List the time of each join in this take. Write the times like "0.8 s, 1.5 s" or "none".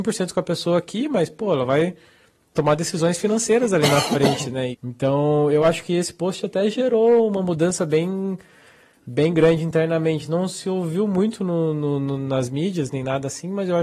4.7 s